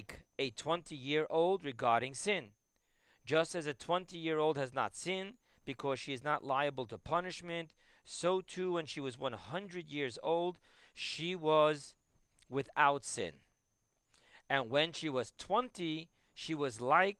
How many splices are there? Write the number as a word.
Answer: zero